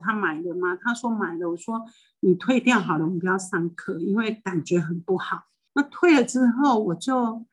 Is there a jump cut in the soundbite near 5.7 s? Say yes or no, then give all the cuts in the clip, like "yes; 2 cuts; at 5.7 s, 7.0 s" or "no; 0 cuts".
yes; 1 cut; at 5.7 s